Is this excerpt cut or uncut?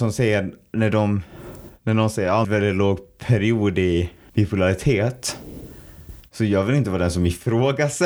cut